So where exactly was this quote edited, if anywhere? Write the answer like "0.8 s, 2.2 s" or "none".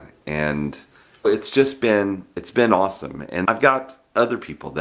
1.2 s, 3.4 s